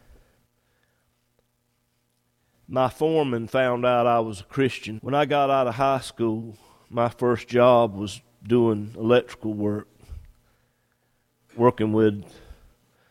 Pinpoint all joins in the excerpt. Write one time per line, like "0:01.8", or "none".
0:05.0